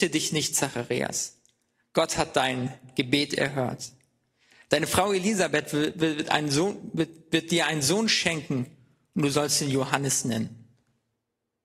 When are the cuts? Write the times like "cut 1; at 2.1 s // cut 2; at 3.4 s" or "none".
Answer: none